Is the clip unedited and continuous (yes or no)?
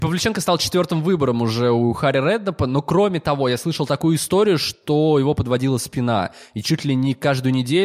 yes